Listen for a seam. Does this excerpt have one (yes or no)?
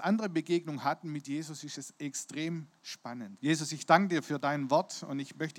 yes